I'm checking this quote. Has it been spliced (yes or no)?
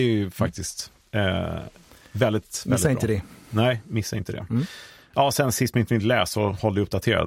no